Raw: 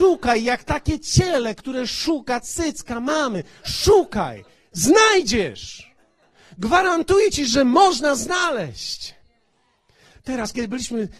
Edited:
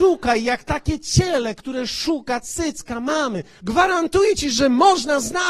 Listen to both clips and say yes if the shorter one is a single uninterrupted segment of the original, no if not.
no